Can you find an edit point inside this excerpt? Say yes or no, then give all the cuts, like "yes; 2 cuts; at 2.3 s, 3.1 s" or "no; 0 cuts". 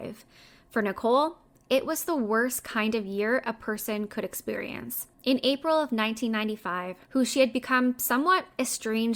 yes; 2 cuts; at 5.1 s, 7.1 s